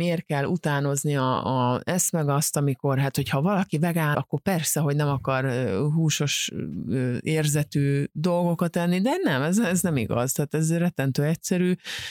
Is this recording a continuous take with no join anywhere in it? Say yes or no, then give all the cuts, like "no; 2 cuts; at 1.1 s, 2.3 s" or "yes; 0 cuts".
no; 1 cut; at 4.1 s